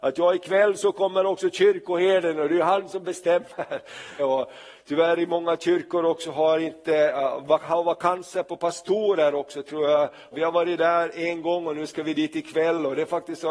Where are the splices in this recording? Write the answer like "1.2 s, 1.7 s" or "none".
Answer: 4.2 s, 10.3 s